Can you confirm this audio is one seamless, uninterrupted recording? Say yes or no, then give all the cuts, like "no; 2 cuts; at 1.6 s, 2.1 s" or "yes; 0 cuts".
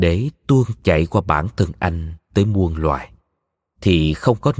yes; 0 cuts